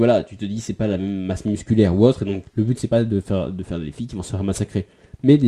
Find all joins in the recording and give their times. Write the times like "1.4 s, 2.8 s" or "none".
2.4 s